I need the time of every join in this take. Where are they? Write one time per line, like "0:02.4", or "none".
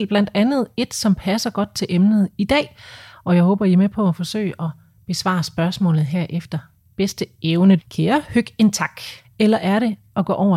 0:07.8
0:09.2